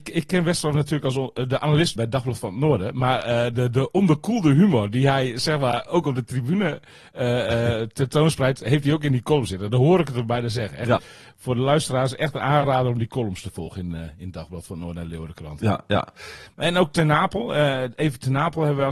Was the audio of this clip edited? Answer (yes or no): yes